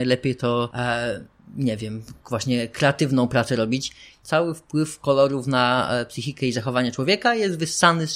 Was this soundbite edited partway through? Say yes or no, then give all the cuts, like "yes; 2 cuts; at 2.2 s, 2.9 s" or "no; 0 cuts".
yes; 1 cut; at 4.2 s